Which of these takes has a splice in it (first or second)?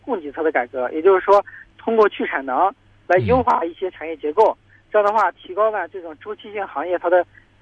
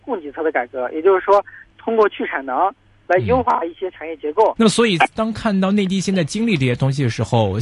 second